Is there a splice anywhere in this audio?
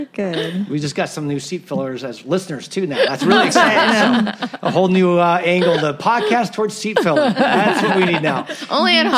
no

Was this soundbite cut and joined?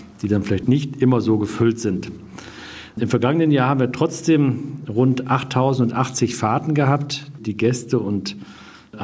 yes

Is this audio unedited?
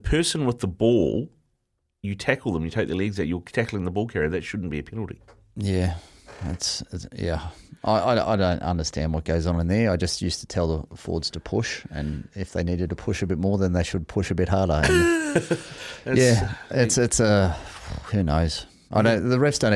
yes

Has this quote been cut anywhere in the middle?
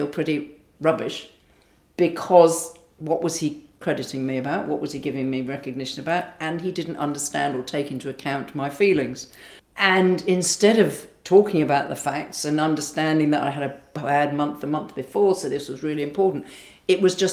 yes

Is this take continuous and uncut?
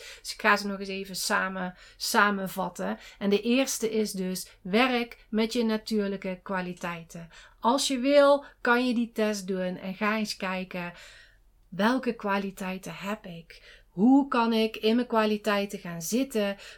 yes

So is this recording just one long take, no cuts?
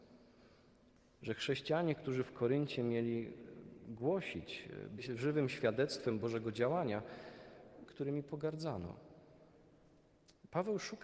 no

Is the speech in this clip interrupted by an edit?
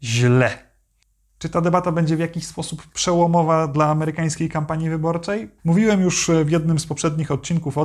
yes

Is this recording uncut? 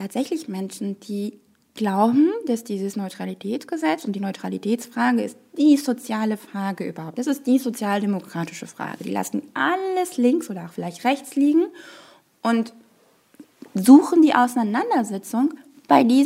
yes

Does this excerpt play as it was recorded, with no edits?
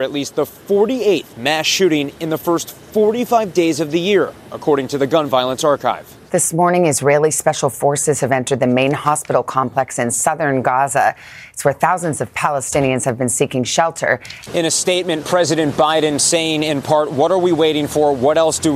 no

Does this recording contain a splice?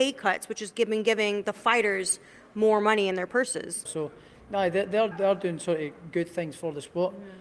yes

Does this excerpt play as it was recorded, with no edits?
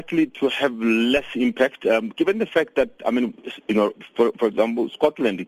yes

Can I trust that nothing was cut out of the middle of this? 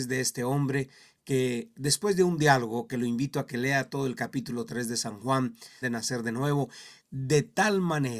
no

